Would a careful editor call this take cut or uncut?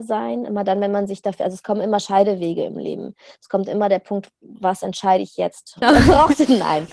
cut